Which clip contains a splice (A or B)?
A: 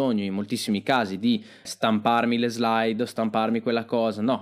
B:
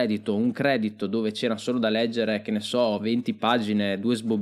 A